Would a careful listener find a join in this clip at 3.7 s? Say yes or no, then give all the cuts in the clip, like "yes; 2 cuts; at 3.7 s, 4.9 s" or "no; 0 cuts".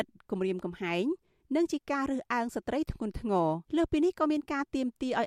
yes; 1 cut; at 3.7 s